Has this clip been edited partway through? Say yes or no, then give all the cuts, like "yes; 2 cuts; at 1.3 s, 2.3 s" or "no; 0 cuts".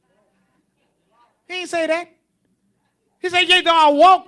no; 0 cuts